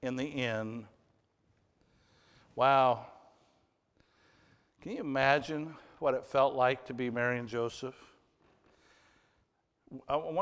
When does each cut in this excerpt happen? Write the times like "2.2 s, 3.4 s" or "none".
none